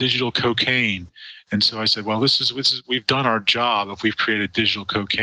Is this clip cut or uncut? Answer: uncut